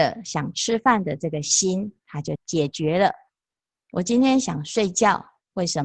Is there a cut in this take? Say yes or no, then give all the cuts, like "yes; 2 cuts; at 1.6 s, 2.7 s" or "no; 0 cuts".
yes; 1 cut; at 2.4 s